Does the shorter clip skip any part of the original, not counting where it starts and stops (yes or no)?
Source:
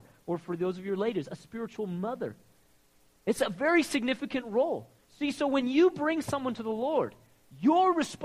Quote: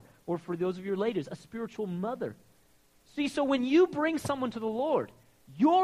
yes